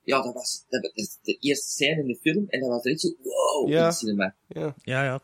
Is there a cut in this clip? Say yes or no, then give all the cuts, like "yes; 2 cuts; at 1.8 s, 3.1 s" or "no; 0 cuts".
no; 0 cuts